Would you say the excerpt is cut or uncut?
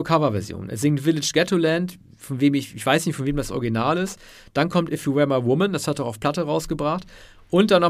uncut